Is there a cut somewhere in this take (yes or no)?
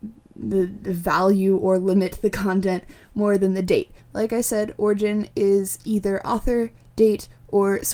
yes